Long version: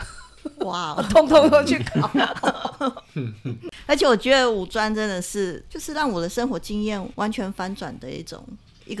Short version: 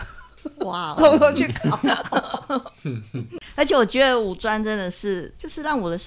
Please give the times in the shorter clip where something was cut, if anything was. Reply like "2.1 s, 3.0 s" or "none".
1.0 s